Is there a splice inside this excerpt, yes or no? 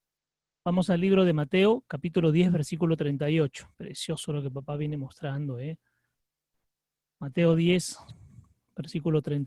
yes